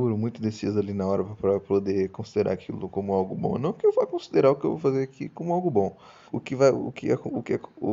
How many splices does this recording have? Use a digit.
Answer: 1